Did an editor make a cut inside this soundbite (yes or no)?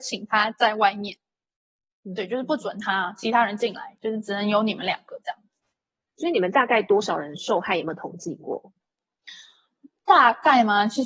no